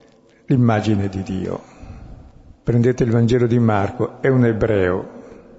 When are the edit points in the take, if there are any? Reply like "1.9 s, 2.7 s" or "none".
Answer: 2.6 s

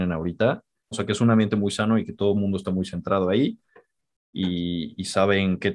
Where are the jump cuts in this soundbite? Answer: 0.9 s

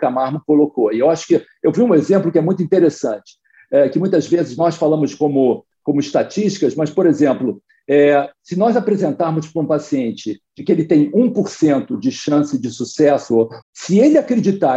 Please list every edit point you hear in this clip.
13.6 s

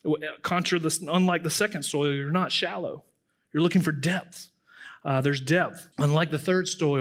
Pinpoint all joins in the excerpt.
5.9 s

